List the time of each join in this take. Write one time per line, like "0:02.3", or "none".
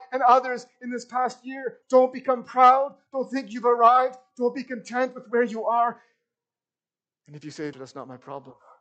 0:01.8
0:07.7